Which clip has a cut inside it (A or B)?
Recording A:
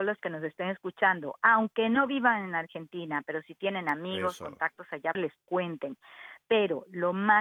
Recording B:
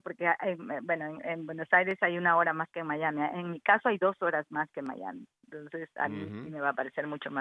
A